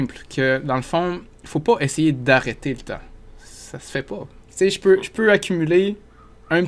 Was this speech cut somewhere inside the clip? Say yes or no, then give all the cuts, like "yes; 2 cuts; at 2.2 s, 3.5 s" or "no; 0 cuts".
yes; 1 cut; at 4.4 s